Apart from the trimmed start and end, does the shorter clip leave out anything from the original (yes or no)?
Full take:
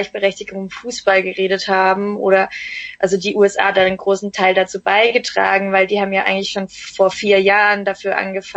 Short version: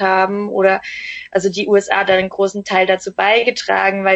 no